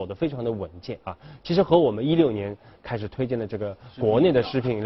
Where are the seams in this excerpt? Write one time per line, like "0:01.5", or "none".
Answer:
none